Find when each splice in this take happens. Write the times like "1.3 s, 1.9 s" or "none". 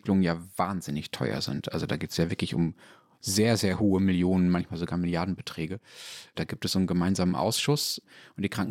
6.3 s